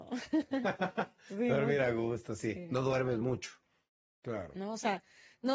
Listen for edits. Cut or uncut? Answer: cut